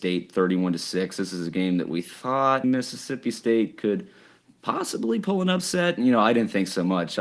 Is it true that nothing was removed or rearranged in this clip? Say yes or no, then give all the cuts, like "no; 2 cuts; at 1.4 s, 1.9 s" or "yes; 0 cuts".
no; 1 cut; at 2.6 s